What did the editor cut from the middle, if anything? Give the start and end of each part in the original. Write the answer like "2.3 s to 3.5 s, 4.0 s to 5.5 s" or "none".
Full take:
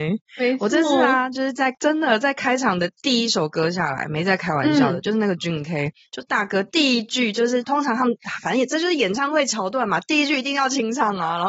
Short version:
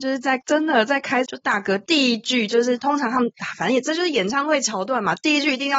2.6 s to 6.1 s